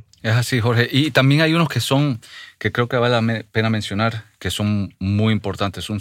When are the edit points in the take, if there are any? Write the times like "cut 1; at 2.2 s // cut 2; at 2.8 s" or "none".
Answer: none